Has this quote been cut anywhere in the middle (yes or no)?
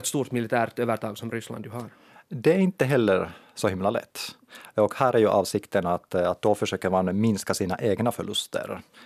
no